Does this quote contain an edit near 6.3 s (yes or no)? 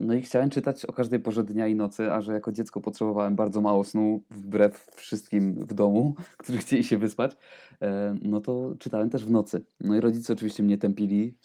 no